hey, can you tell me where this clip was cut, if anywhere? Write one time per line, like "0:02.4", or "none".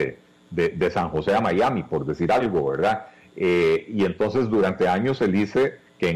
none